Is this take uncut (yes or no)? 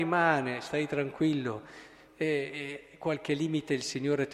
yes